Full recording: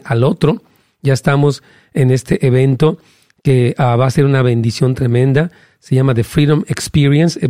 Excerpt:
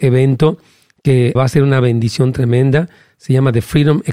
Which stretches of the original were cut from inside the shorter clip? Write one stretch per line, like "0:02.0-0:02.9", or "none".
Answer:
0:03.8-0:04.0